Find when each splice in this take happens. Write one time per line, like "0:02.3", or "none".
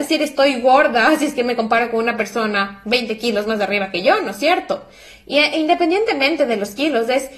none